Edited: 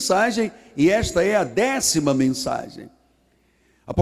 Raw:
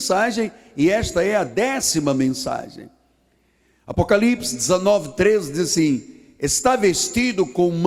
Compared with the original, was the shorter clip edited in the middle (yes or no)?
no